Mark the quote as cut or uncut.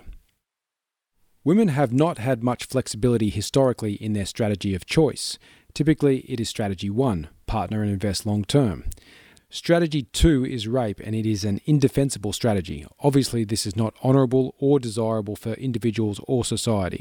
cut